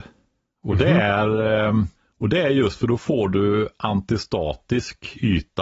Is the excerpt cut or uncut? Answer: uncut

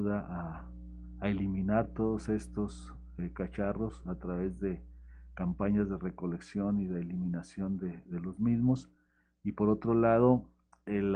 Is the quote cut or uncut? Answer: uncut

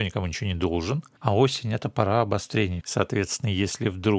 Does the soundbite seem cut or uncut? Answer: cut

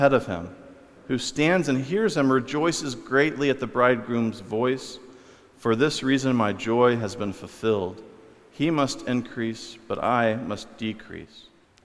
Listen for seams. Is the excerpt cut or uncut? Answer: cut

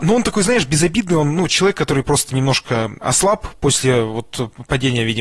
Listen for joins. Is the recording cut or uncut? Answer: uncut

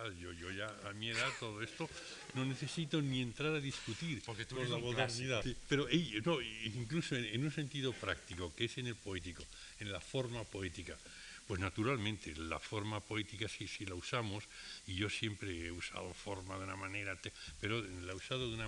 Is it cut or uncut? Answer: cut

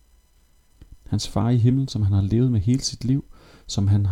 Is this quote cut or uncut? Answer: cut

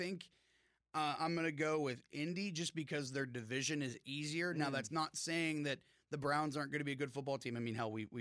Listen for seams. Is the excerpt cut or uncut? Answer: uncut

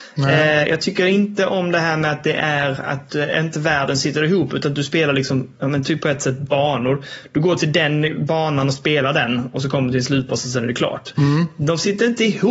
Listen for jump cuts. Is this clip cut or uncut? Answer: uncut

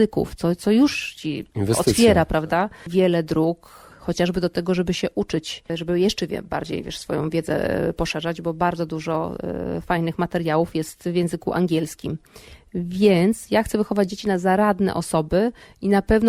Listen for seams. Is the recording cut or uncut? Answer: uncut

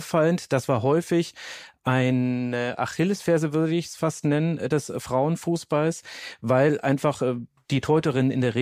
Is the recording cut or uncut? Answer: uncut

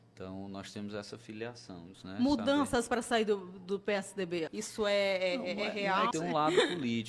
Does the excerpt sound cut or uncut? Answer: cut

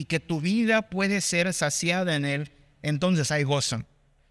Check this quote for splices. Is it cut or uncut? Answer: uncut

